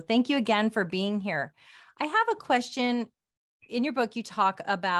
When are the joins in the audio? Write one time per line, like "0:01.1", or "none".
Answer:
none

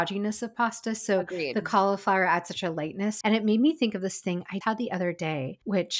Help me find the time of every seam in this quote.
0:03.2
0:04.6

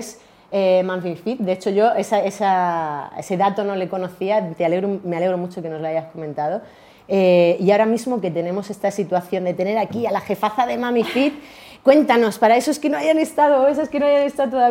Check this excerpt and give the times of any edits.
none

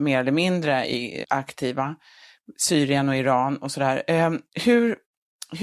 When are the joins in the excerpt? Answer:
0:01.2

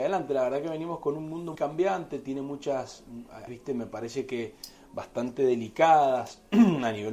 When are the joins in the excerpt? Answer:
0:01.5
0:03.5

